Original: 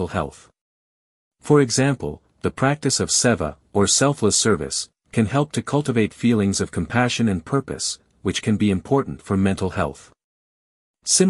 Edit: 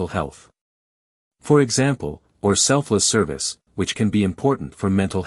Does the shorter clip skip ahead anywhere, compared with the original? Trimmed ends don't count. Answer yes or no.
yes